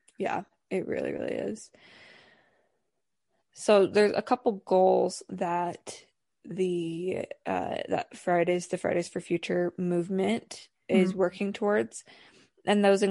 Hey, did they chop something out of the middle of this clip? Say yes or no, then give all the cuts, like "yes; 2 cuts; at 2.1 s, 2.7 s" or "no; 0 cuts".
no; 0 cuts